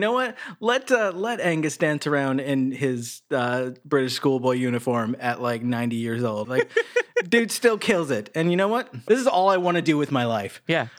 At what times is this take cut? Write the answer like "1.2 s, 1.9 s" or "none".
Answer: 6.4 s, 9.1 s